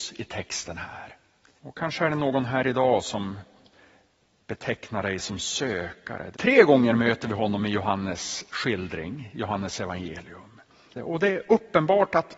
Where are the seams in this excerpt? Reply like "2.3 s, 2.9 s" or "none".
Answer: 1.6 s, 6.3 s, 11.0 s